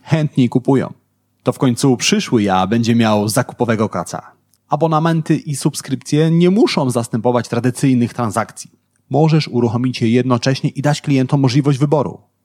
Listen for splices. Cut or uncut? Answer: cut